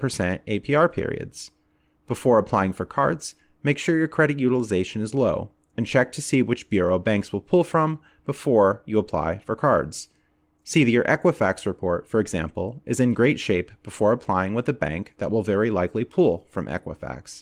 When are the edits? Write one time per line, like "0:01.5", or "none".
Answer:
none